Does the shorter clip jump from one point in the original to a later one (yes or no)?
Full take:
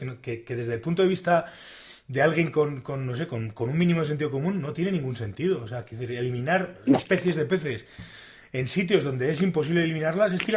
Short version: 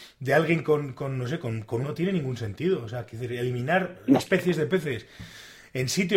yes